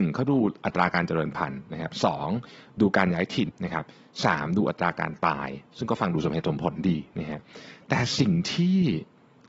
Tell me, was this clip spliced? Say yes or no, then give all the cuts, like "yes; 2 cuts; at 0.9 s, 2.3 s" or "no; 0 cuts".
yes; 2 cuts; at 3.5 s, 5.7 s